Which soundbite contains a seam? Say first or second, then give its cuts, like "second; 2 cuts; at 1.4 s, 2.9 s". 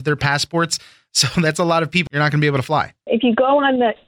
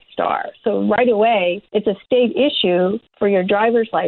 first; 1 cut; at 2.1 s